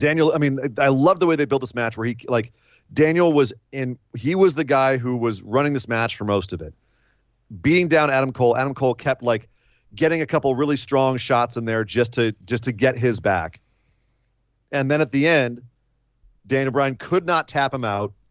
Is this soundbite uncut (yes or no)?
yes